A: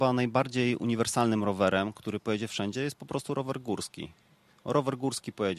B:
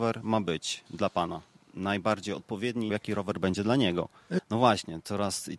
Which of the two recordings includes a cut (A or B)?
B